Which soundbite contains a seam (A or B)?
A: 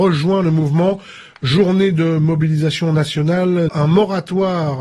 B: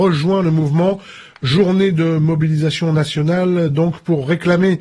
A